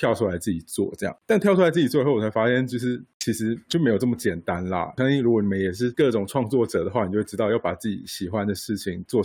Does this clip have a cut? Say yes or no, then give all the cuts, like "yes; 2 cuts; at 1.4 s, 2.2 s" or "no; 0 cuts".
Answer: no; 0 cuts